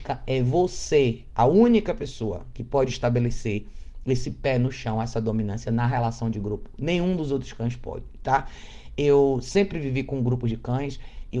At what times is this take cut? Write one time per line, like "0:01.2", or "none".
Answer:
none